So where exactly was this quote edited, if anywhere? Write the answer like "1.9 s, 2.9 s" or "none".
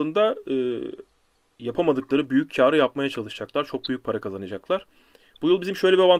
none